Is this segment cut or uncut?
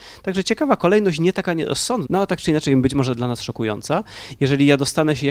cut